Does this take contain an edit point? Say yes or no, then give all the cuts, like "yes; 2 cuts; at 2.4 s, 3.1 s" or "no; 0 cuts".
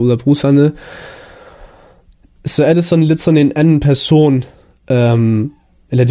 no; 0 cuts